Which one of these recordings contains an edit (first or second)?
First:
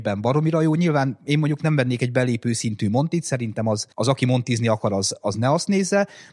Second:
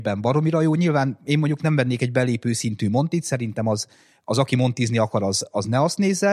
first